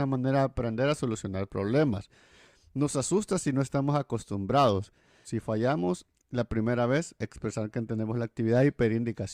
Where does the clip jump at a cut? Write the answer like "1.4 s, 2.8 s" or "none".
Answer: 5.2 s, 7.2 s